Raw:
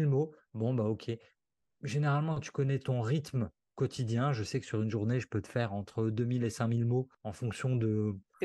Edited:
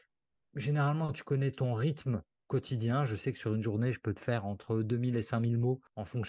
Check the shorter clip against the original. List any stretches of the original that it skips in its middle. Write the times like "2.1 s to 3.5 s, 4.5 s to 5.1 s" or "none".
none